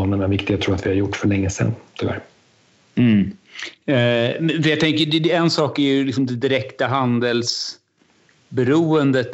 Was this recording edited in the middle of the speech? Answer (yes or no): no